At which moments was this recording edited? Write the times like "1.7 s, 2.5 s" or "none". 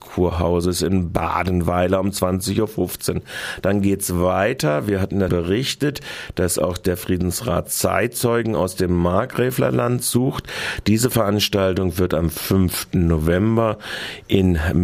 5.3 s